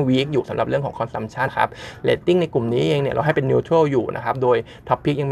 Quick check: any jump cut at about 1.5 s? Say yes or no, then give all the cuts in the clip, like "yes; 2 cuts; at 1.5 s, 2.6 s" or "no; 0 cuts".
yes; 1 cut; at 1.5 s